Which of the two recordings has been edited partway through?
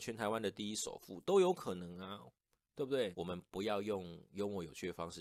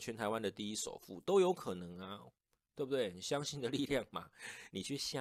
first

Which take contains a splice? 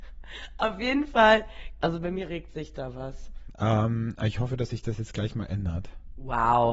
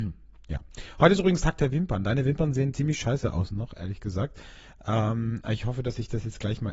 first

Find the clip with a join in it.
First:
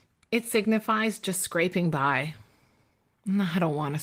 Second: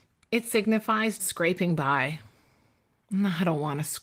second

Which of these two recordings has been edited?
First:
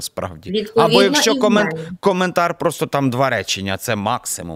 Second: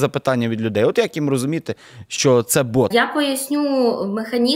second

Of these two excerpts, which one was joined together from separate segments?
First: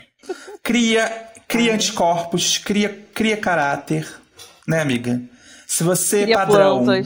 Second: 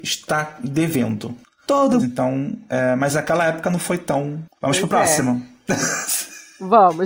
second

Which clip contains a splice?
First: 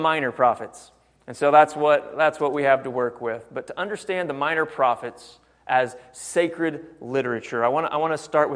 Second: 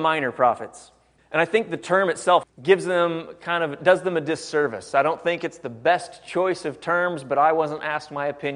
second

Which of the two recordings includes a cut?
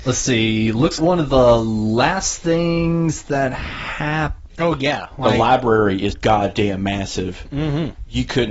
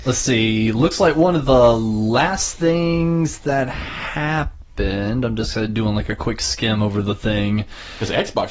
first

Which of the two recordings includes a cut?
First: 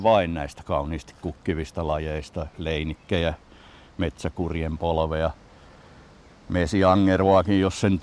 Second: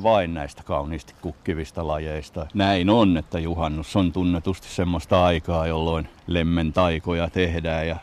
second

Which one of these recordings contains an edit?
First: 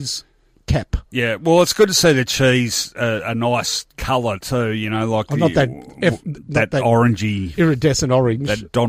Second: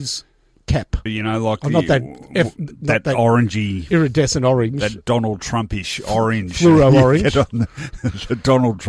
second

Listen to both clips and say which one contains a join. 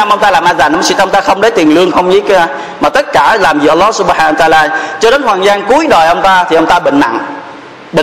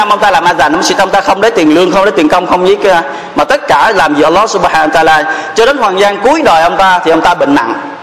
first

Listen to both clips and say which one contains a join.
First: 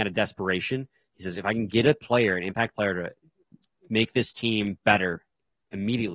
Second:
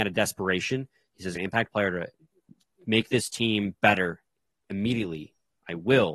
second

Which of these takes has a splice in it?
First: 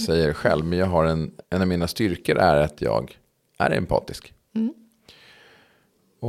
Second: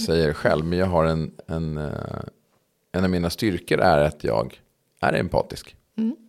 first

